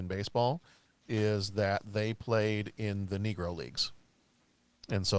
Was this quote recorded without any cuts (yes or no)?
yes